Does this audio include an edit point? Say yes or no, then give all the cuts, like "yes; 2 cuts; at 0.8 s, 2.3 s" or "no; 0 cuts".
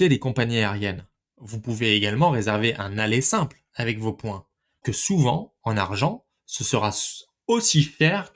yes; 1 cut; at 4.8 s